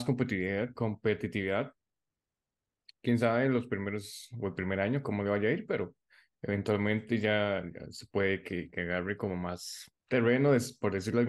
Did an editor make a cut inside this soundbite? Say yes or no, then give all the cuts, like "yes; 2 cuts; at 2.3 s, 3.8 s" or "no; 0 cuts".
yes; 1 cut; at 10.0 s